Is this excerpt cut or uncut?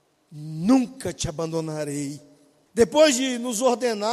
cut